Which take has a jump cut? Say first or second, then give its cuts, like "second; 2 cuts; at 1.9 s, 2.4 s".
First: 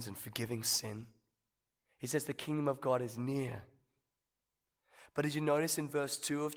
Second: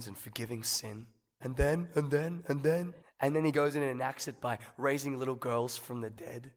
second; 2 cuts; at 1.4 s, 3.0 s